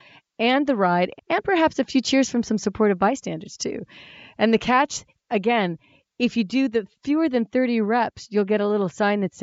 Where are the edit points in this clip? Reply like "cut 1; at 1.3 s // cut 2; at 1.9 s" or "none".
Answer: cut 1; at 5.2 s